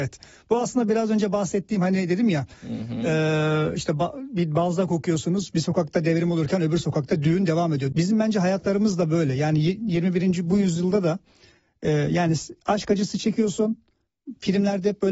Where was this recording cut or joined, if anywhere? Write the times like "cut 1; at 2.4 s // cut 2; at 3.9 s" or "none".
cut 1; at 7.9 s